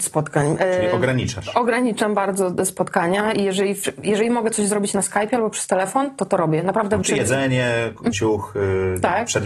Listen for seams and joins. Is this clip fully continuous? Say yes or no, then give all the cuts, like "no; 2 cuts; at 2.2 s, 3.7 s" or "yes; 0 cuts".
no; 2 cuts; at 7.0 s, 8.1 s